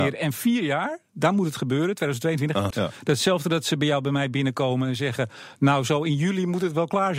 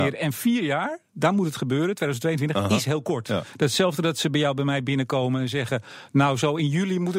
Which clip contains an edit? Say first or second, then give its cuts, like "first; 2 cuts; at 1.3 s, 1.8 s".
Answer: first; 1 cut; at 2.7 s